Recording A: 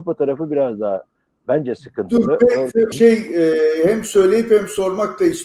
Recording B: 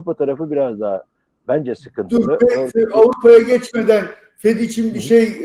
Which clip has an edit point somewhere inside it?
A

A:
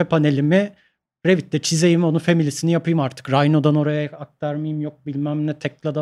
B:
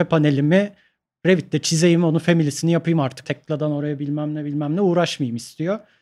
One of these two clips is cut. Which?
B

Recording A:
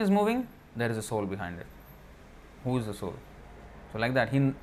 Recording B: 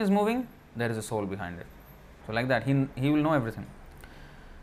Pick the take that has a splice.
B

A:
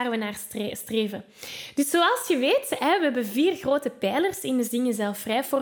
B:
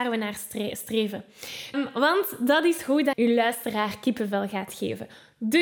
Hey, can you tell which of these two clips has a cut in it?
B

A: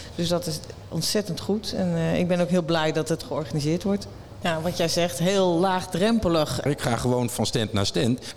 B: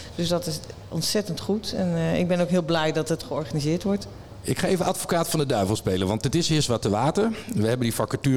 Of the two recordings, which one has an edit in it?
A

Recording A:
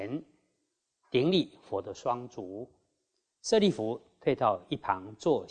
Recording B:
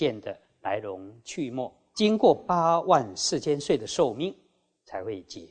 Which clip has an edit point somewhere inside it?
B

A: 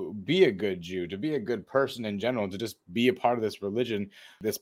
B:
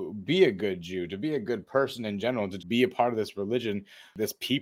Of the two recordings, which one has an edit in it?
B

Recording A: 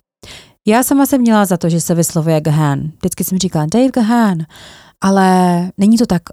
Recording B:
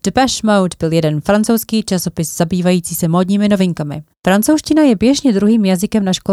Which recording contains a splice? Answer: B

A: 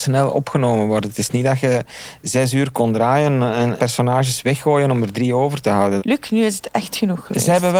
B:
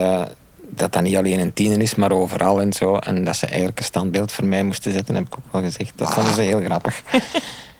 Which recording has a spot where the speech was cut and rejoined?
A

